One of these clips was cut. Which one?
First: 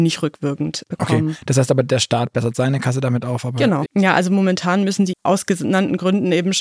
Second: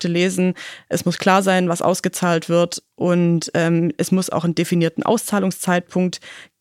first; 2 cuts; at 3.9 s, 5.1 s

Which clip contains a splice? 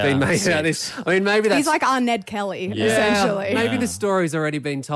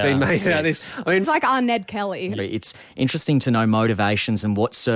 second; 2 cuts; at 1.2 s, 2.4 s

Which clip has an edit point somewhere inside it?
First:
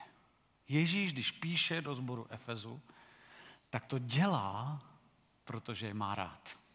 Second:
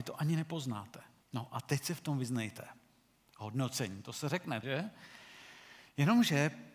second; 2 cuts; at 1.2 s, 4.6 s

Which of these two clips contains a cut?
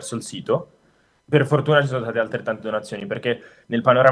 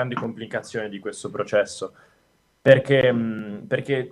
first; 1 cut; at 1.2 s

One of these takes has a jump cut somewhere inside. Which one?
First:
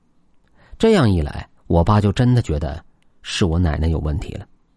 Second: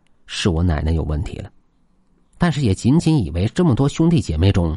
first; 1 cut; at 1.6 s

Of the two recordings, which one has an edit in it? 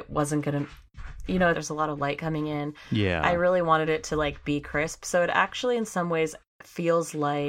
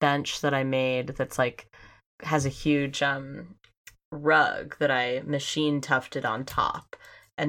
first; 1 cut; at 1.5 s

